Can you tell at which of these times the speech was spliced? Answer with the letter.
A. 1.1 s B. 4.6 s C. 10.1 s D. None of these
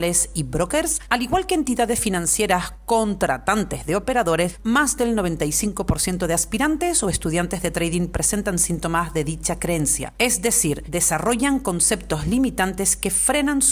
B